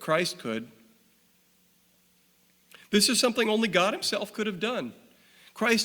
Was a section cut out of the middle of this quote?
no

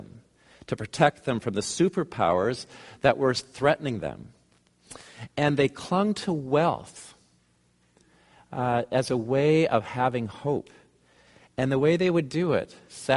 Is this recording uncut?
yes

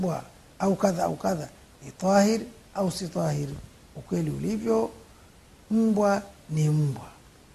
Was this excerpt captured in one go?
yes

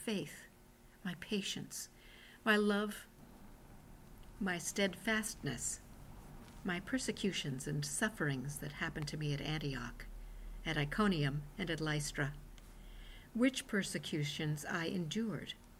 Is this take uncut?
yes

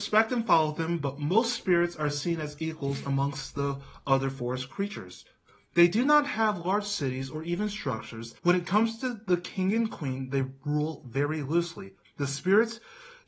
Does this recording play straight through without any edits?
no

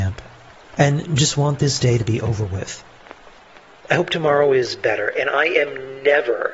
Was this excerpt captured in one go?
yes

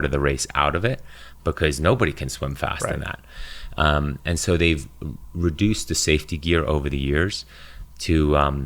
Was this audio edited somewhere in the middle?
no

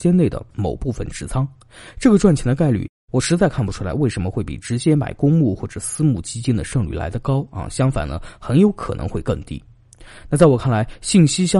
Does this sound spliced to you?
no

